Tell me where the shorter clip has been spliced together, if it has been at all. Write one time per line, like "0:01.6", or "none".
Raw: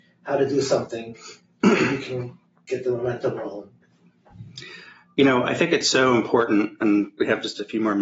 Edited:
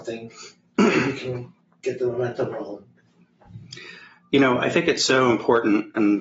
none